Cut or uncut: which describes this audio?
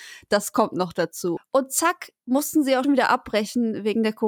cut